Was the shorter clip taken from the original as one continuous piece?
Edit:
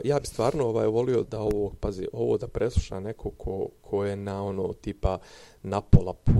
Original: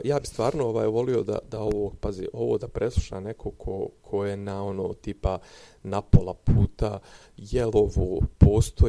no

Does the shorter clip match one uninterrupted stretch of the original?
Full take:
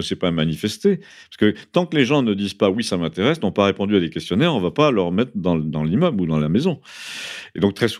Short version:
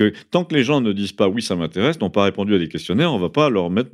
yes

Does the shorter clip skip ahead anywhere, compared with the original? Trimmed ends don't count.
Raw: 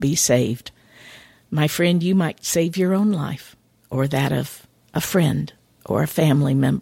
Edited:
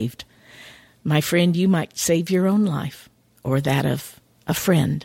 no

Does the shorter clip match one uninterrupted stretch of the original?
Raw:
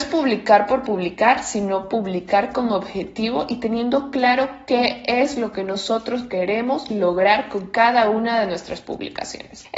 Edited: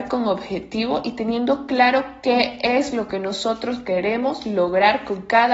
yes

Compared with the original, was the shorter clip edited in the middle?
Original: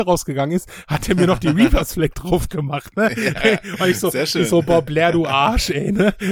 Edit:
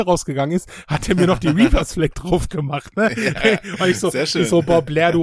no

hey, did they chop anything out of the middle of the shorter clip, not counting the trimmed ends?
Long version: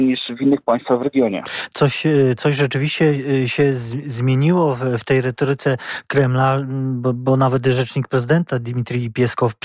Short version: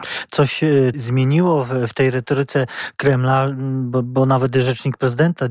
yes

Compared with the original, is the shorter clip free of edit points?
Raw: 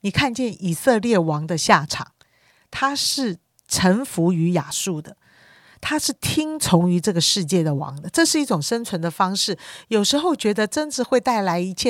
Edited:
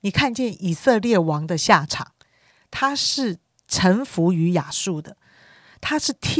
yes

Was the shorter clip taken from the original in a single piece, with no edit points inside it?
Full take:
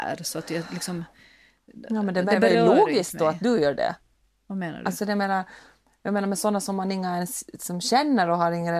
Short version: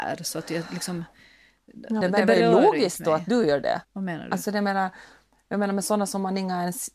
no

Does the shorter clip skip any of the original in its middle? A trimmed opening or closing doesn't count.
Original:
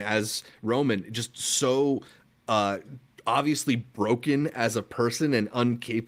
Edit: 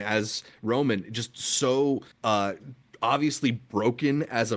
yes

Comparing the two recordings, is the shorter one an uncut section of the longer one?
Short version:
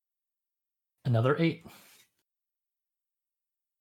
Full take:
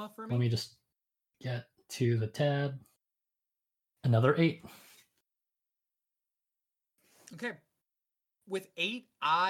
yes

